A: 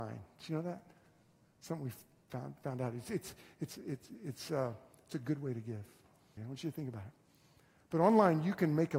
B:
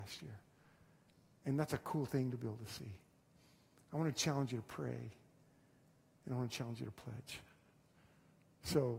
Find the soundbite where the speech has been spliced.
A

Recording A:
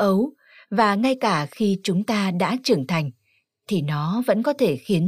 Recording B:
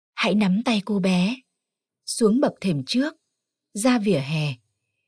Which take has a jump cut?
B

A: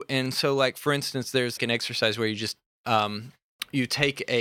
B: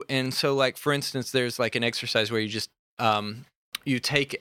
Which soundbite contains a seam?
A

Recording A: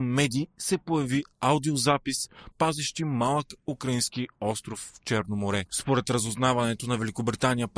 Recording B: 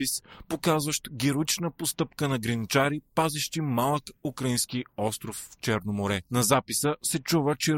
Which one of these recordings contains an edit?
A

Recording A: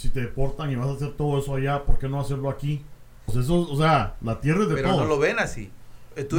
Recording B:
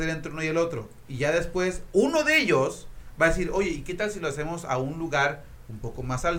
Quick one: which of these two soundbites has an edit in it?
A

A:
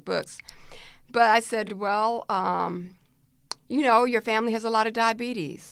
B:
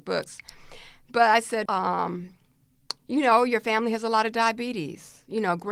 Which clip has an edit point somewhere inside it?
B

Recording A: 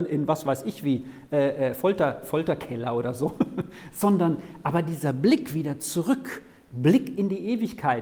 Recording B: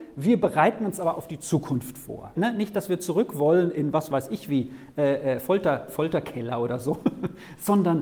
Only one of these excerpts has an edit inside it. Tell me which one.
B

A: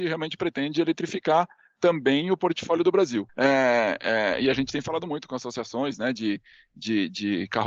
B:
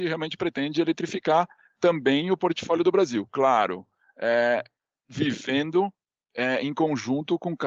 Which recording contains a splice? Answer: A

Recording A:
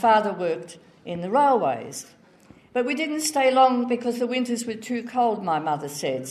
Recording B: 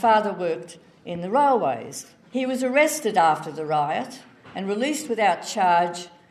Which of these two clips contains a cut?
B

